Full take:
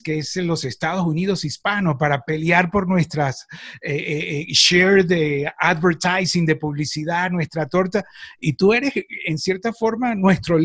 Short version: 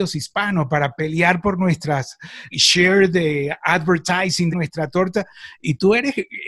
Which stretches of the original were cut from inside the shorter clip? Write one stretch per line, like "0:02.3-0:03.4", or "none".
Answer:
0:03.8-0:04.5
0:06.5-0:07.3